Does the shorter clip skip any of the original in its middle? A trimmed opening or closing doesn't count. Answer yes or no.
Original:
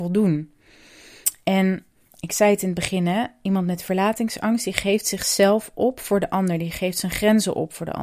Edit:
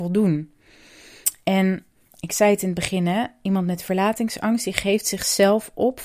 no